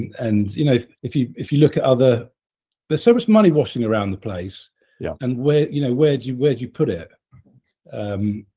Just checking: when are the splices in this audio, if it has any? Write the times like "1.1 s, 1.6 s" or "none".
0.9 s, 5.2 s